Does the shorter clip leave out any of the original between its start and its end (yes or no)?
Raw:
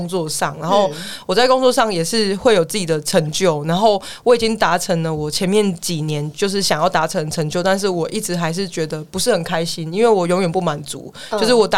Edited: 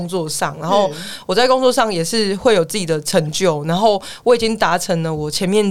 no